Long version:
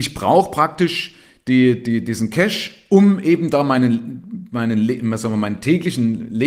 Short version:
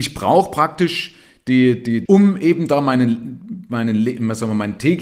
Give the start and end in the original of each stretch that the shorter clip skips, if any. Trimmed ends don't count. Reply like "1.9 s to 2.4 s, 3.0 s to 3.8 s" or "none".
2.1 s to 2.9 s